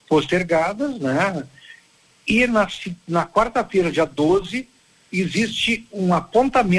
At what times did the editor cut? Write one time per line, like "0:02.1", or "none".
none